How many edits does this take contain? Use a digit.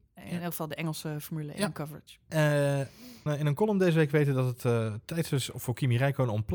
1